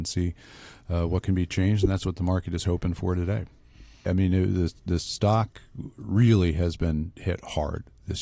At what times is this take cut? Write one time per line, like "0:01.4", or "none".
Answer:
0:04.1